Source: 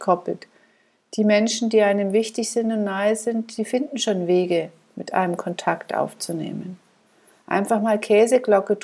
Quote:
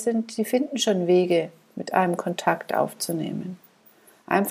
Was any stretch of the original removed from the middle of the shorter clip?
no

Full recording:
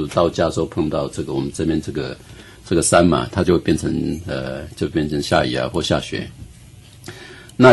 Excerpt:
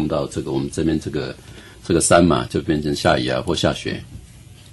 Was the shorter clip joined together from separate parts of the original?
yes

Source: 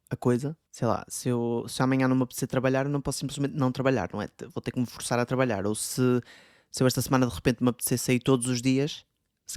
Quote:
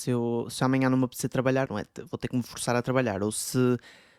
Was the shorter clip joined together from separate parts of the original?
yes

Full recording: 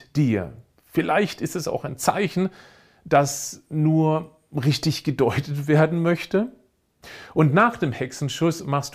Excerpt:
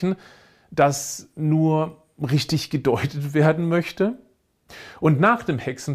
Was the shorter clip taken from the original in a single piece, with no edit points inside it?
yes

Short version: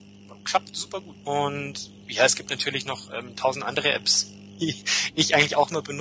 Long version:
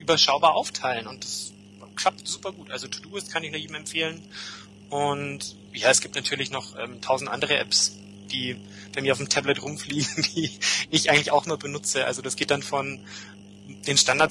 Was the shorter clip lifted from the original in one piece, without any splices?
no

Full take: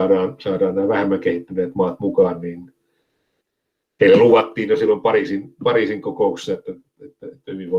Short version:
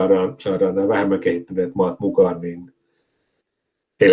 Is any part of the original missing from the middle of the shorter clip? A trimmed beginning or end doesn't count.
no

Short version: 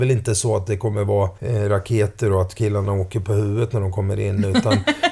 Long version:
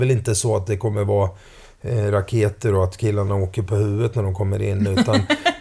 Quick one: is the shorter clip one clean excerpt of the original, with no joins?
no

